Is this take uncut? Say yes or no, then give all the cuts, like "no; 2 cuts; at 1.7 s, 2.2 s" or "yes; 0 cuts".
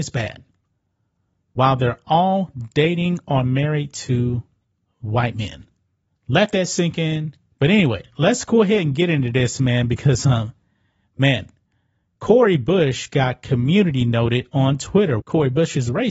no; 2 cuts; at 7.5 s, 15.2 s